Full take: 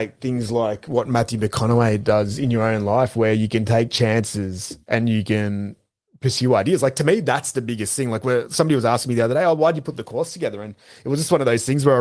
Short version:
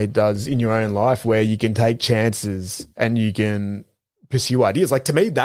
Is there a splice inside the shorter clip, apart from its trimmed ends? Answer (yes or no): no